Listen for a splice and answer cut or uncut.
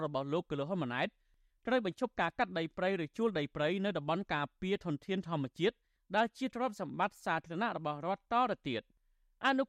uncut